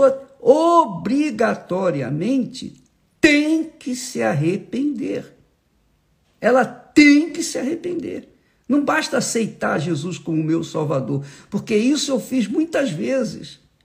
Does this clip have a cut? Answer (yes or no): no